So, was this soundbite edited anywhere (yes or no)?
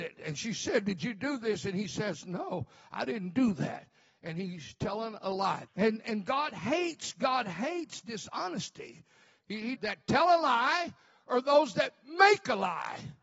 yes